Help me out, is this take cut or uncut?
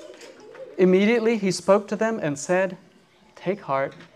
uncut